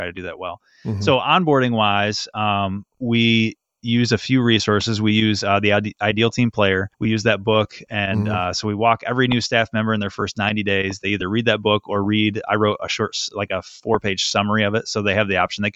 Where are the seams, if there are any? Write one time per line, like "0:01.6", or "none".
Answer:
0:06.9

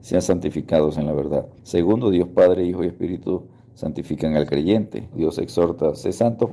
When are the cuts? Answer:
0:01.6
0:05.1

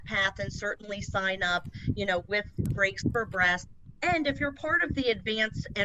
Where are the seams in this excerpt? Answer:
0:02.7

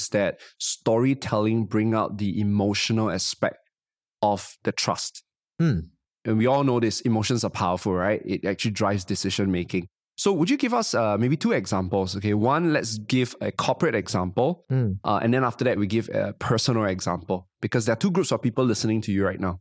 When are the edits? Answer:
none

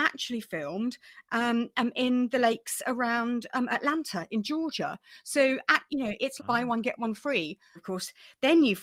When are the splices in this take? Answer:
0:06.4
0:07.8

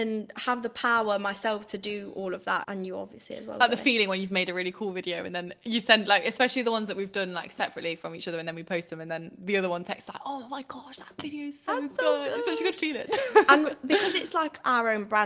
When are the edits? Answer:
0:02.6

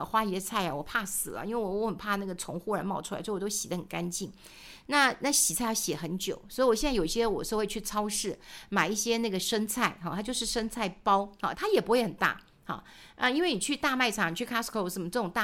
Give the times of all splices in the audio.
0:11.5

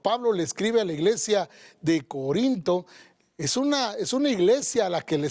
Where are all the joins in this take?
none

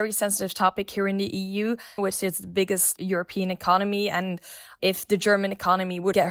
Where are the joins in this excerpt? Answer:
0:02.0

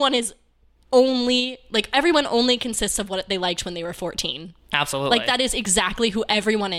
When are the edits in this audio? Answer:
none

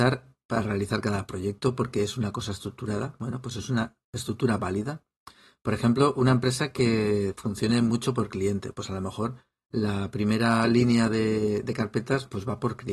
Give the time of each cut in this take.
none

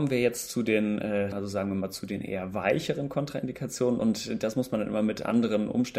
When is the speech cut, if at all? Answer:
0:01.3

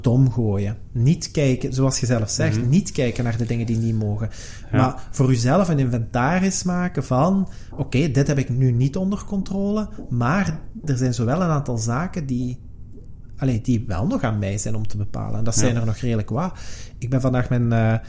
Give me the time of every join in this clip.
0:10.8

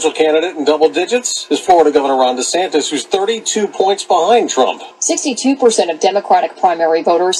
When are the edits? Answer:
none

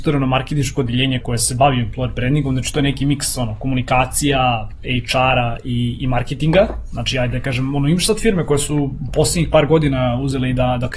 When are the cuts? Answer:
0:01.2

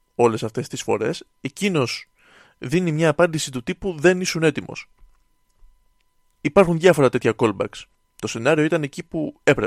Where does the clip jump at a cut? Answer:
0:06.3
0:07.9

